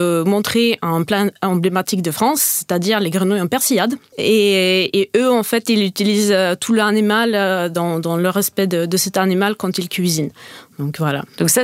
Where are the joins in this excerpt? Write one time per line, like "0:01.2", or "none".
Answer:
0:04.1